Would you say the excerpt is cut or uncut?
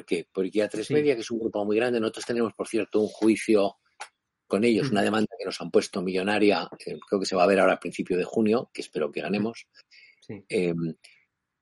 uncut